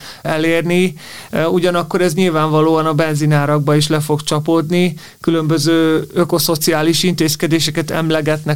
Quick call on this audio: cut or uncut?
uncut